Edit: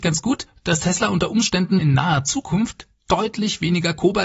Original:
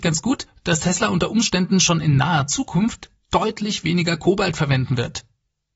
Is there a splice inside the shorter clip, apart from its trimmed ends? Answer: yes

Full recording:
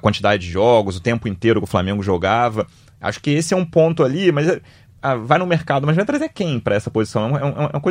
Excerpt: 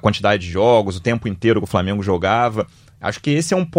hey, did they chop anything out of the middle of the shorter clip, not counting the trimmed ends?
no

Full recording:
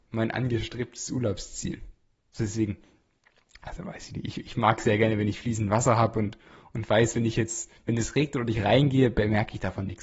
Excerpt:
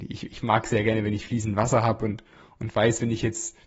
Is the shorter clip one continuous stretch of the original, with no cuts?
yes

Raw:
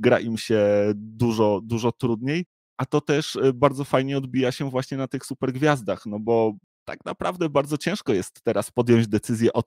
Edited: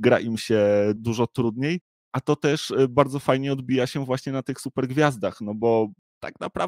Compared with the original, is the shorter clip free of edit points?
no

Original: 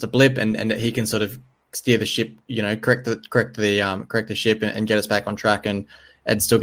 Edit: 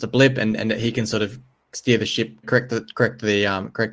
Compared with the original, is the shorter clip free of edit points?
no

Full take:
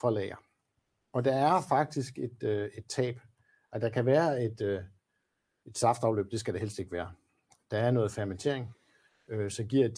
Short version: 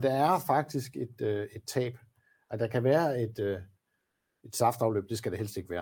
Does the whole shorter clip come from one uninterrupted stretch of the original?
yes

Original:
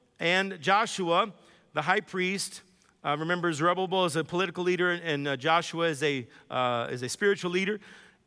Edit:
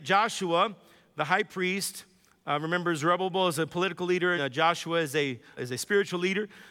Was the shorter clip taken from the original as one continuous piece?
no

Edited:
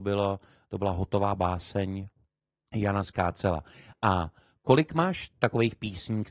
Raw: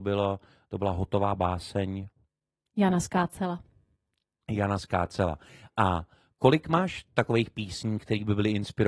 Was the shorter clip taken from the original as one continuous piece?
no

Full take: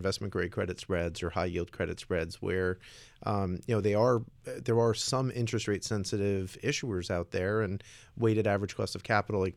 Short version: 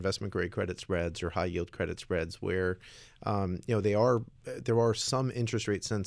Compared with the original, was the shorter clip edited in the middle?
no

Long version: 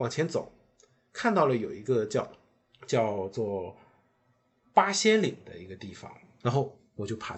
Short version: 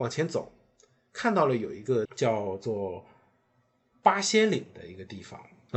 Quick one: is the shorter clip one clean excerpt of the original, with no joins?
no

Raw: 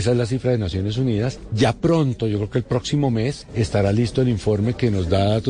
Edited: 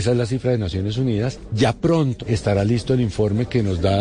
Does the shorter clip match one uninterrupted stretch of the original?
no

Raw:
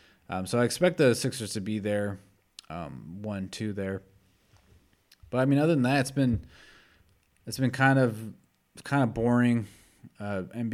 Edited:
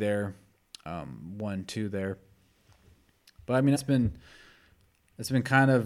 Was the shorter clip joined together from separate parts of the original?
yes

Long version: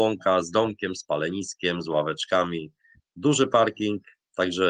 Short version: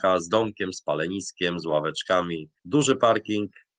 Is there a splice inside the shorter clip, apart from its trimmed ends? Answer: yes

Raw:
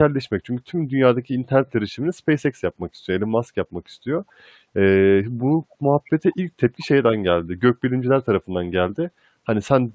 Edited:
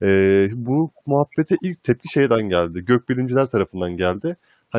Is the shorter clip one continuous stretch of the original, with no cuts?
yes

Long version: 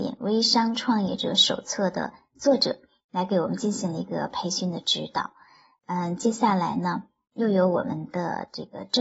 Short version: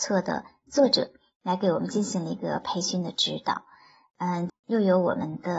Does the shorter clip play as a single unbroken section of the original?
no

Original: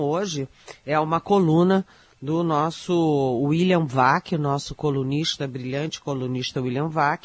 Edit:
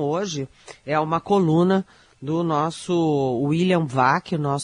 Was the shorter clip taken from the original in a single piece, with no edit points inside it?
yes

